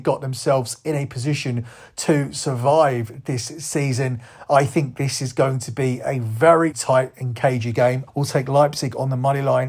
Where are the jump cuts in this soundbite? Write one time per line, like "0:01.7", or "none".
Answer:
0:06.7
0:08.1